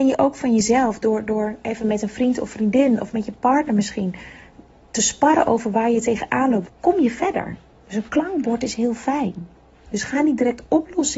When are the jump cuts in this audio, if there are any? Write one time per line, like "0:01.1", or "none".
0:06.7